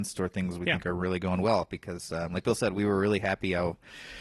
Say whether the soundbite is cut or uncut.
uncut